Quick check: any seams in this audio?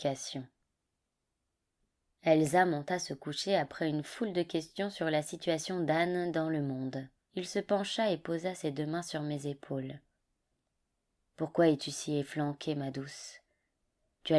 yes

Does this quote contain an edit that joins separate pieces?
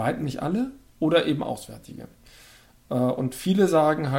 no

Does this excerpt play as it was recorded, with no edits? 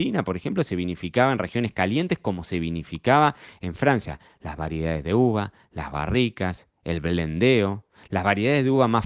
yes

